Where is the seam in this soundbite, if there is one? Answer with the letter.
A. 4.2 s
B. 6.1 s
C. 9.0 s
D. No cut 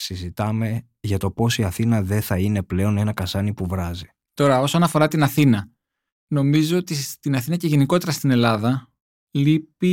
A